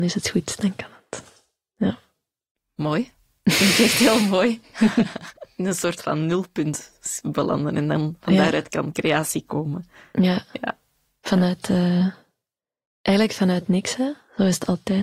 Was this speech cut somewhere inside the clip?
no; 0 cuts

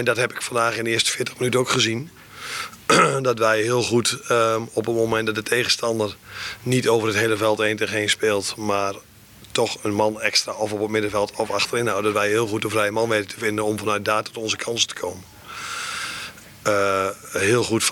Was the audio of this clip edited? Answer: no; 0 cuts

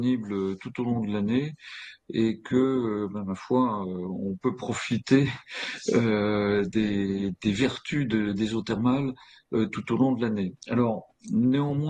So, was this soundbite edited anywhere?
no; 0 cuts

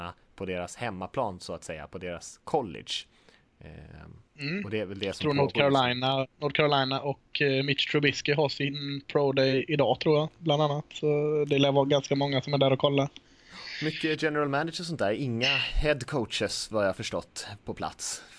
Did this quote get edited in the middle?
yes; 1 cut; at 6.3 s

